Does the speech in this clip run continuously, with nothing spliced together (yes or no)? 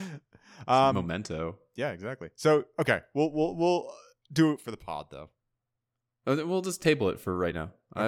yes